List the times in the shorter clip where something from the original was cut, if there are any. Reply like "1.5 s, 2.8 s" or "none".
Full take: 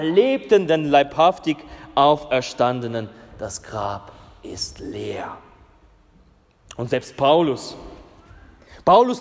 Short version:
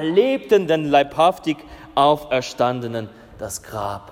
none